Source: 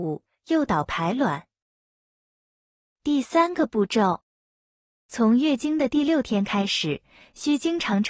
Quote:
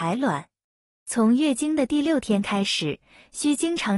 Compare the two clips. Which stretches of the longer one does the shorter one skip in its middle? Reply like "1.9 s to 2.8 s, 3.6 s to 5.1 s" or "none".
1.9 s to 4.9 s

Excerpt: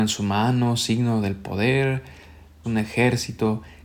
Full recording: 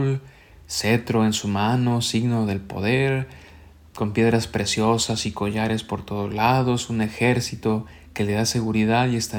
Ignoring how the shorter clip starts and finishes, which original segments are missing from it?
3.9 s to 6.9 s

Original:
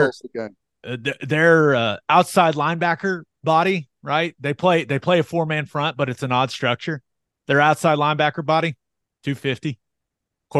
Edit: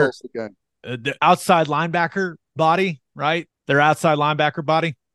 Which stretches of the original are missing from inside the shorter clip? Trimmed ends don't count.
1.2 s to 2.0 s, 4.4 s to 7.3 s

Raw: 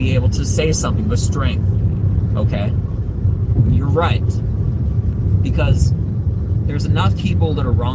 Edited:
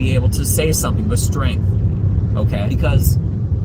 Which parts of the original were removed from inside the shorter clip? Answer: 2.7 s to 5.4 s

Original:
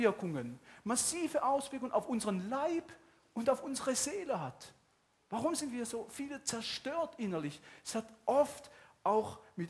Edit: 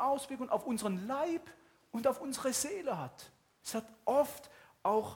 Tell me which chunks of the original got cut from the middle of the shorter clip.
5.0 s to 7.8 s

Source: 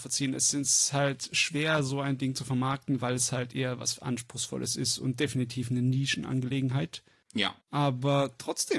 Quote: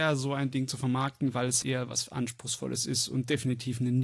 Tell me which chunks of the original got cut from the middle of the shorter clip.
3.3 s to 3.5 s

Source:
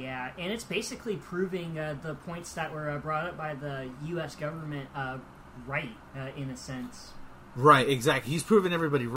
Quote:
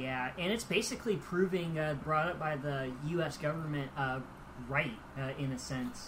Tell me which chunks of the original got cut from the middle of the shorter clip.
2.0 s to 3.0 s

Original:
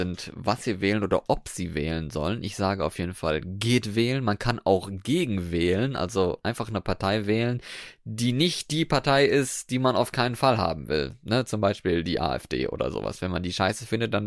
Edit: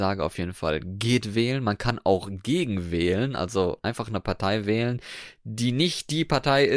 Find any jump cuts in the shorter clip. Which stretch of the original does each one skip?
none

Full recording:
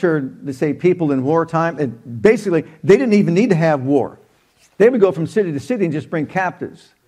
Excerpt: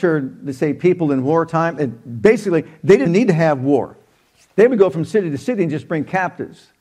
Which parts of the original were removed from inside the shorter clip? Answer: 3.1 s to 3.3 s

